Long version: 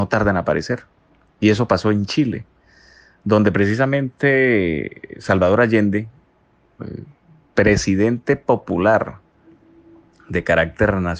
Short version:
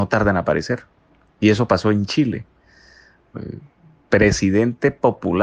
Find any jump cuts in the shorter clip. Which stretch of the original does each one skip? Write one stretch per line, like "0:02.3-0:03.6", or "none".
0:03.2-0:06.6